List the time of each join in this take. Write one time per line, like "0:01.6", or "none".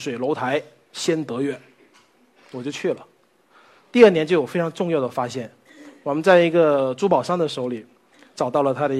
none